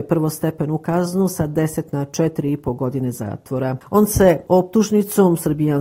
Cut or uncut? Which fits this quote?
uncut